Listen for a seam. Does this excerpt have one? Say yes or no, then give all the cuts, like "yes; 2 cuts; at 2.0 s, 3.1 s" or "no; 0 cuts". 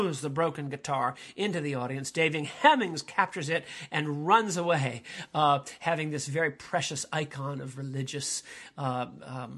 no; 0 cuts